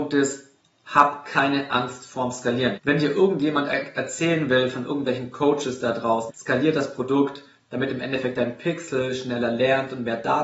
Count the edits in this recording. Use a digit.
2